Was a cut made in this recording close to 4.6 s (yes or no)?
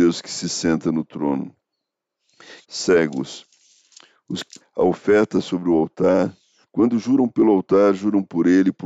yes